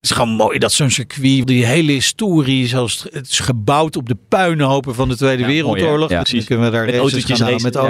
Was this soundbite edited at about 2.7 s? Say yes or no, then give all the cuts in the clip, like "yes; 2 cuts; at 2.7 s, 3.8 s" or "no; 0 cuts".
no; 2 cuts; at 1.4 s, 6.2 s